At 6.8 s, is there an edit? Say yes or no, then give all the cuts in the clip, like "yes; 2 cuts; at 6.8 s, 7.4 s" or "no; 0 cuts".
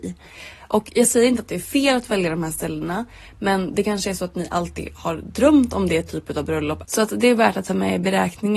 yes; 1 cut; at 6.8 s